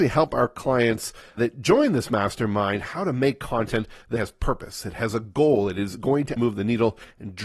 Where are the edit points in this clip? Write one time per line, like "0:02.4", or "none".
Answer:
0:01.4
0:04.1
0:06.4